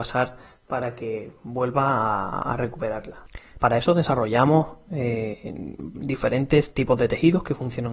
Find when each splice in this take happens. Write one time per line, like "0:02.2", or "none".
0:03.6